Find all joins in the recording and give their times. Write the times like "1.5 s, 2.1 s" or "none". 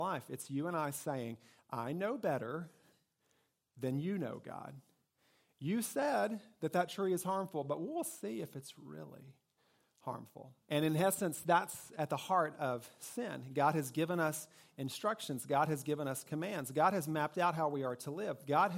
10.6 s